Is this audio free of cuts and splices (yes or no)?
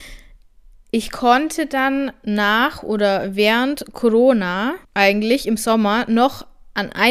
no